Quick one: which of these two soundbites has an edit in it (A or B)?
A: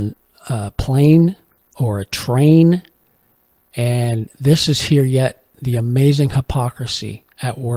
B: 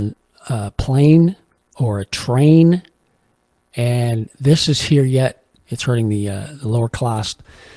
B